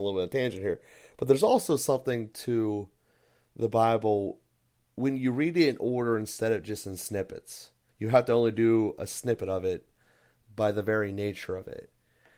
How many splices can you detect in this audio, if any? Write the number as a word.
one